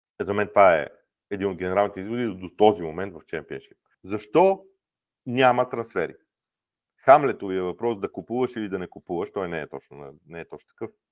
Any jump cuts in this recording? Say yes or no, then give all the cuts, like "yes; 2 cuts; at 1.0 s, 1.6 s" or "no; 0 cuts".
yes; 1 cut; at 3.9 s